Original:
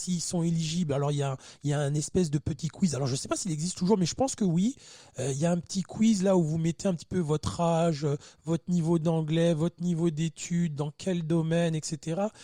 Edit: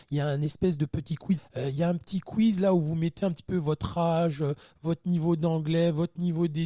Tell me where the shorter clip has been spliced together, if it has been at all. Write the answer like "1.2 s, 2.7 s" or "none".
1.4 s